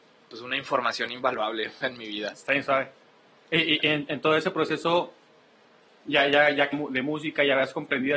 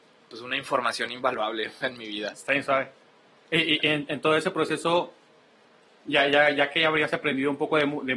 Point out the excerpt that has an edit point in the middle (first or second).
first